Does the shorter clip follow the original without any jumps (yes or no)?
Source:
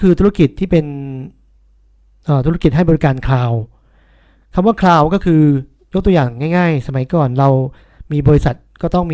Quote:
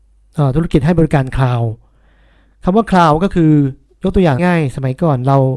no